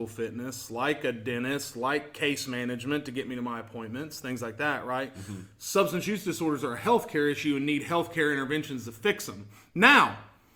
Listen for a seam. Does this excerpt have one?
no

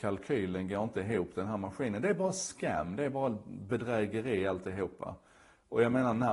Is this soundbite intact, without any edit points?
yes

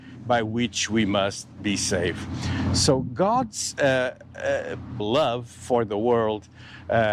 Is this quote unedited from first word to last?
no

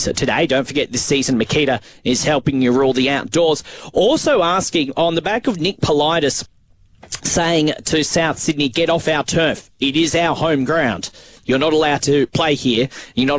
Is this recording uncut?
yes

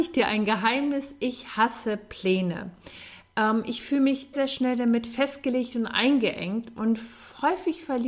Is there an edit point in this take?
yes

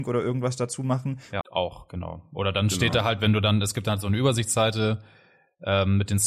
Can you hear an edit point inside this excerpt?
yes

